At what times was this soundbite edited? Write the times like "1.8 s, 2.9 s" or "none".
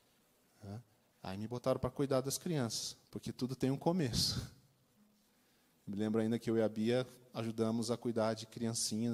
3.1 s